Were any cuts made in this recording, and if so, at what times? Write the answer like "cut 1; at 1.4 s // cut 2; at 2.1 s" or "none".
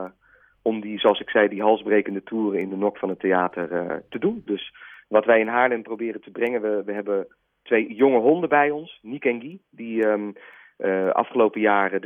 cut 1; at 4.5 s